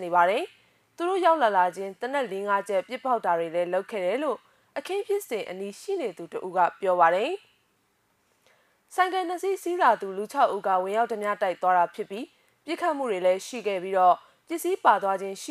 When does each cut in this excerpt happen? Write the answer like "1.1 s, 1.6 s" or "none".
none

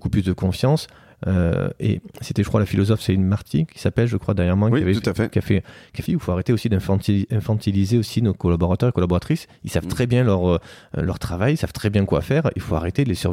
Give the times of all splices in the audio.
6.1 s

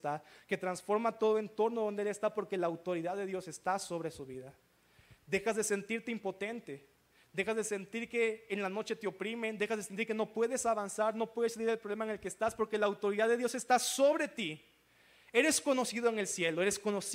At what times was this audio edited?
none

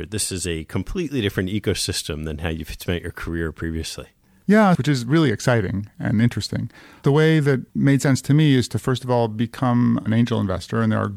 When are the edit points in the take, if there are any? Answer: 4.8 s, 7.7 s

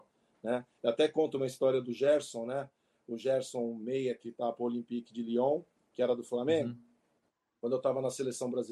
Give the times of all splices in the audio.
none

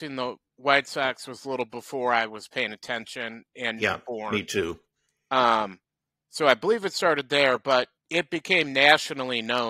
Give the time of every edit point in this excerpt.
8.0 s

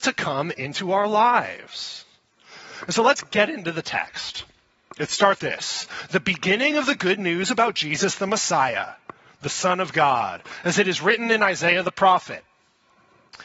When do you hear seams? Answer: 5.4 s

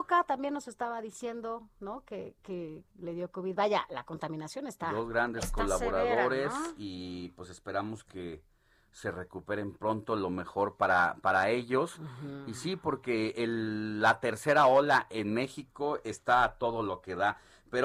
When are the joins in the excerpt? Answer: 2.9 s

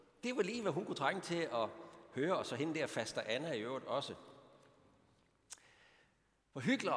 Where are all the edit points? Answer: none

